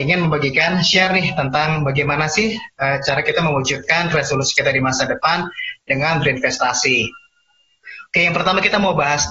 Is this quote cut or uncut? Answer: uncut